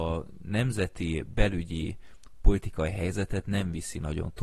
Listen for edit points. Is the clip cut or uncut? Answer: uncut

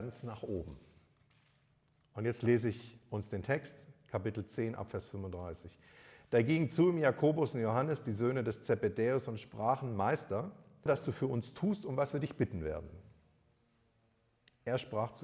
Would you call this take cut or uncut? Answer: cut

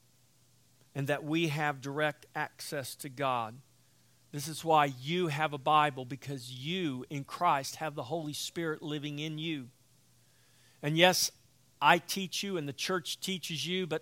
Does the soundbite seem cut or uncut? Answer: uncut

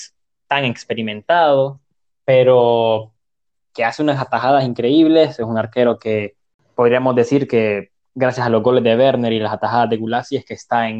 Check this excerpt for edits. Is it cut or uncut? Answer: uncut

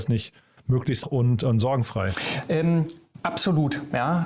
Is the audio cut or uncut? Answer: cut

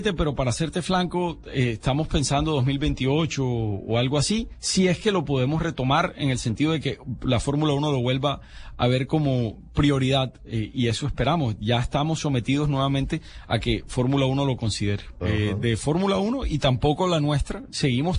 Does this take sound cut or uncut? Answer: cut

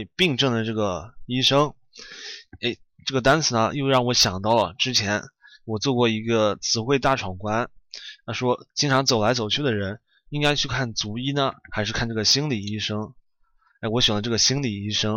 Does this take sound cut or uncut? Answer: uncut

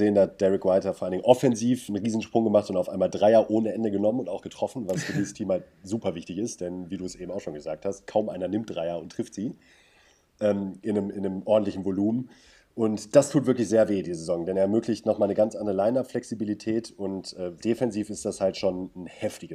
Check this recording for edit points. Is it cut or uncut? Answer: cut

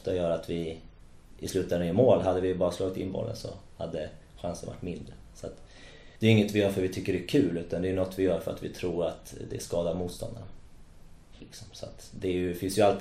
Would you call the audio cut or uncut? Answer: cut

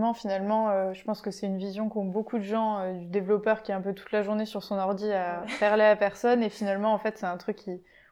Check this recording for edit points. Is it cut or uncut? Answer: uncut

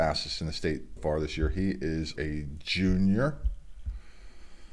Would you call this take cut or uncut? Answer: cut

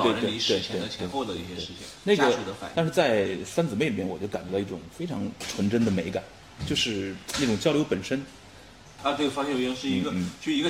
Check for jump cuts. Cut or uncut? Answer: cut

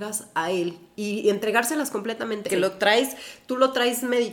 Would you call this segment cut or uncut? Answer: cut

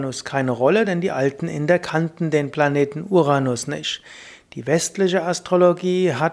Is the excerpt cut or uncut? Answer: uncut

